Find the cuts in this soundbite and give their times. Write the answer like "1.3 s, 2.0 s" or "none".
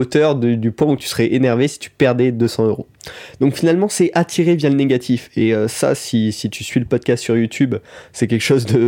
none